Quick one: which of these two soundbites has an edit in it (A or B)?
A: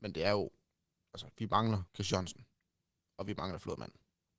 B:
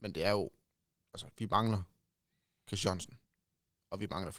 A